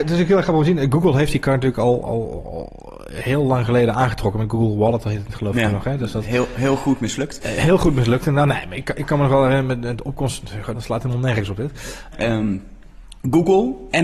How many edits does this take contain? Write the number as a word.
two